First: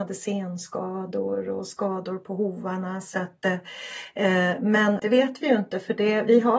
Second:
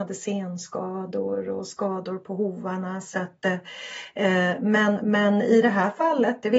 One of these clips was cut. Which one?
first; 1 cut; at 5.0 s

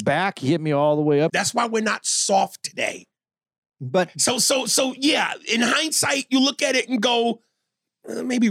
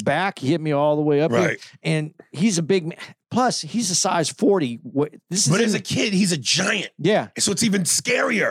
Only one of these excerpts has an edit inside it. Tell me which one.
first; 1 cut; at 1.3 s

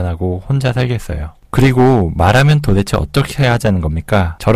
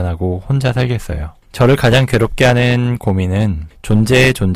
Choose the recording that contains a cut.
first; 1 cut; at 1.4 s

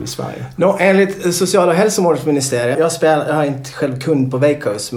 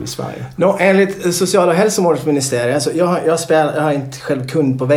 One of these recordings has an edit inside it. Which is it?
first; 1 cut; at 2.7 s

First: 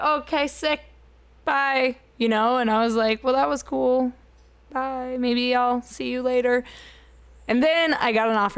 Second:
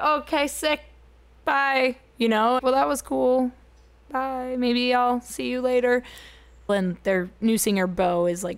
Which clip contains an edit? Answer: second; 2 cuts; at 2.6 s, 6.7 s

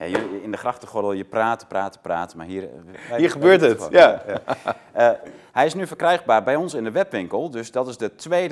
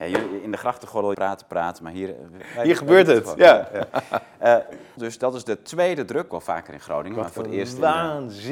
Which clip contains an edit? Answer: second; 3 cuts; at 1.1 s, 5.0 s, 6.3 s

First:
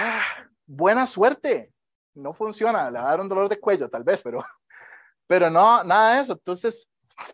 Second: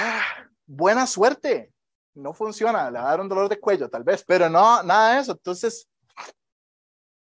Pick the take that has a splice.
second; 1 cut; at 4.2 s

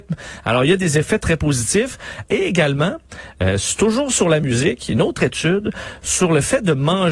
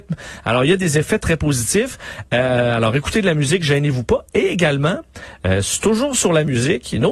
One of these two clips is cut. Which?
first; 1 cut; at 2.3 s

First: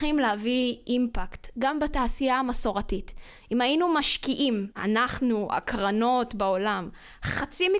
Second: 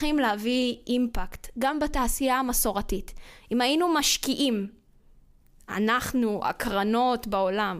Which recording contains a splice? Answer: first; 1 cut; at 4.7 s

